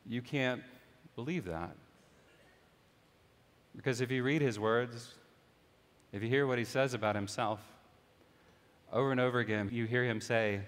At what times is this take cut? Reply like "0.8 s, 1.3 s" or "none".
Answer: 9.7 s

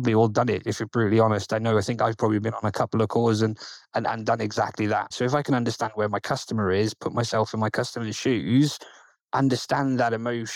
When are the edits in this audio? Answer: 5.1 s

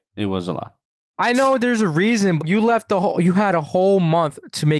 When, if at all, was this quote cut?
2.4 s

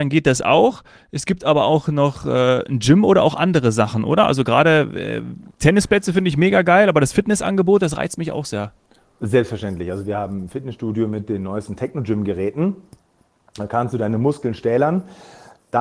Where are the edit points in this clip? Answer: none

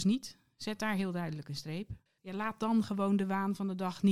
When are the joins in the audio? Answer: 2.1 s

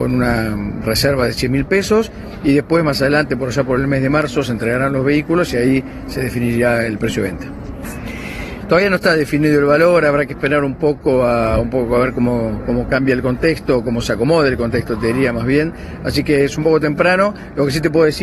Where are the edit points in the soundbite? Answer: 8.6 s

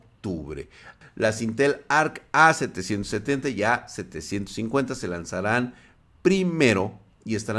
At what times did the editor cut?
1.0 s

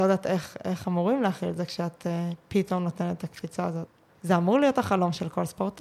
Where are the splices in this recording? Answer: 4.1 s

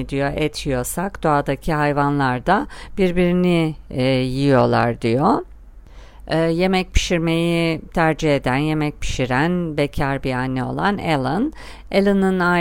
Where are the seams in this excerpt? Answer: 6.2 s

